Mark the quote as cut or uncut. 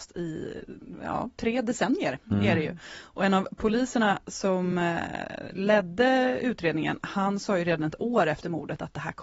uncut